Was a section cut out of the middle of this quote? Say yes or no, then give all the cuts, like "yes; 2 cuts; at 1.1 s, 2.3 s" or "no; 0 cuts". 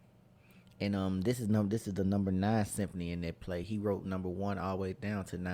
no; 0 cuts